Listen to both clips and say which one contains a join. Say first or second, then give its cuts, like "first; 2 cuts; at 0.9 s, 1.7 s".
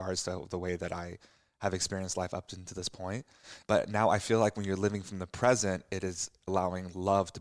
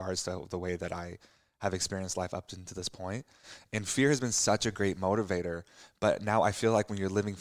first; 2 cuts; at 3.6 s, 6.5 s